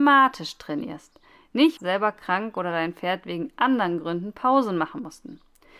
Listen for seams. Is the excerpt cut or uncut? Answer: cut